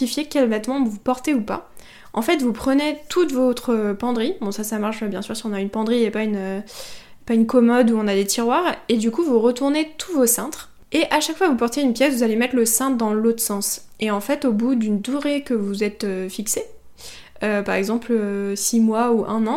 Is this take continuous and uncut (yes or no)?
yes